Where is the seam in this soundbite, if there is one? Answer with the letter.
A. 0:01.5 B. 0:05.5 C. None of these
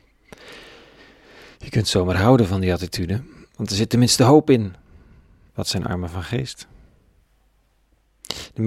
B